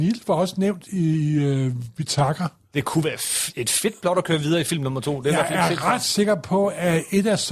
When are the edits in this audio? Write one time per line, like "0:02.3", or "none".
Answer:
none